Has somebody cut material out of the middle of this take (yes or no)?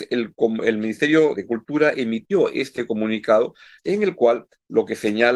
yes